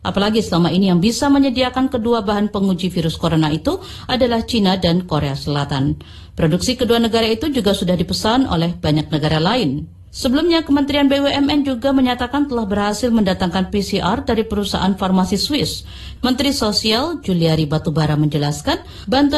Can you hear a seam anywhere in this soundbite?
yes; 1 cut; at 16.2 s

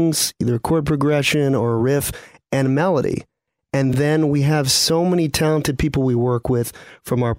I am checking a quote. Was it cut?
no; 0 cuts

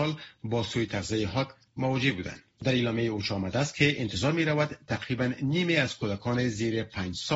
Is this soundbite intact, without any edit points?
no; 1 cut; at 2.6 s

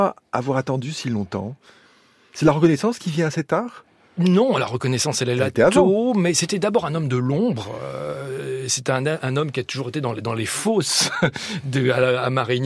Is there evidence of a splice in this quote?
no; 0 cuts

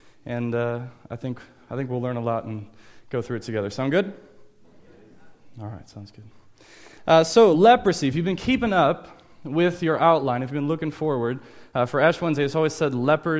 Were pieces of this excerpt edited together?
no; 0 cuts

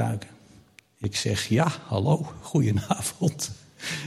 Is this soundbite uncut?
yes; 0 cuts

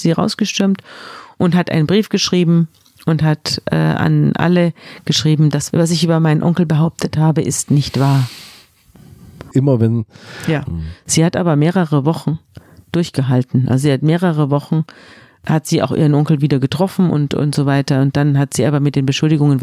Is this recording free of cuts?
no; 2 cuts; at 9.5 s, 10.7 s

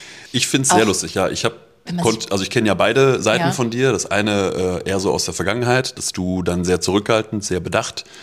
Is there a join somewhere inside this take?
no; 0 cuts

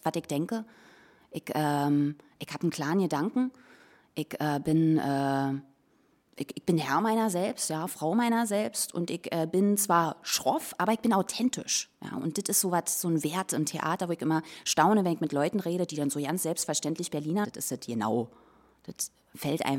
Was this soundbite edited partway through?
yes; 1 cut; at 17.4 s

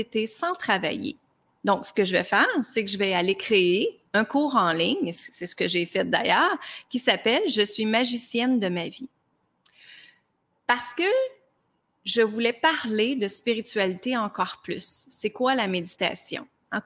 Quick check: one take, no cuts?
yes; 0 cuts

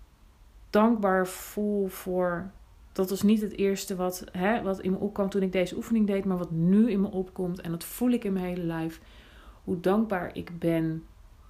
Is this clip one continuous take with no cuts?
yes; 0 cuts

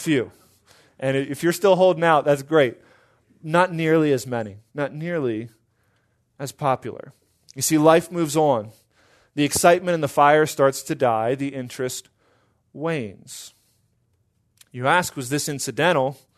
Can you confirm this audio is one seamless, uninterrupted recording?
no; 1 cut; at 4.7 s

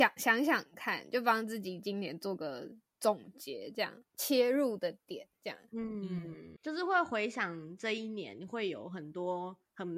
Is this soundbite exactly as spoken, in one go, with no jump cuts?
no; 1 cut; at 4.0 s

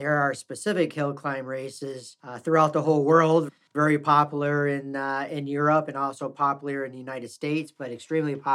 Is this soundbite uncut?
yes; 0 cuts

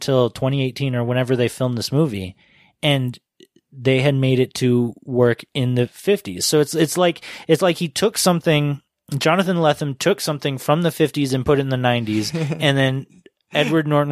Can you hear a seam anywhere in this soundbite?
no; 0 cuts

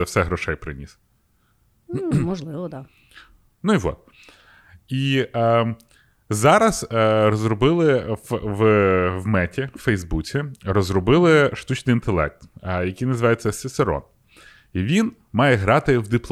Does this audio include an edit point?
no; 0 cuts

